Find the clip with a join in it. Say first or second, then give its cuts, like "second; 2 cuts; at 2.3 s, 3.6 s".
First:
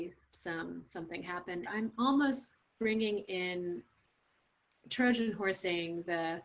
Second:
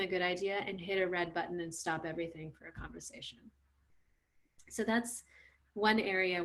first; 1 cut; at 1.7 s